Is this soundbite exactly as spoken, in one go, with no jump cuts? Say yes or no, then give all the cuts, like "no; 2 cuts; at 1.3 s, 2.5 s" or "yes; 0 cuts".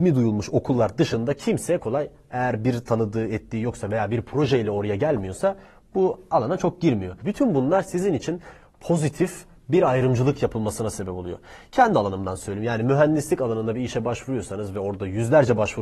no; 2 cuts; at 1.8 s, 7.2 s